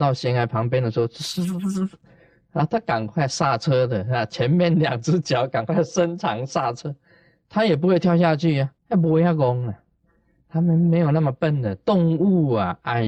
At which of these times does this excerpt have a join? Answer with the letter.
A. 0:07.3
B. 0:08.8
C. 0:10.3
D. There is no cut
B